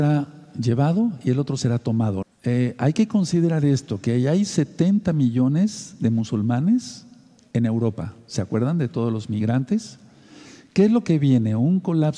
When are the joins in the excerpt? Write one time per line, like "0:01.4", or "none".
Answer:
0:02.2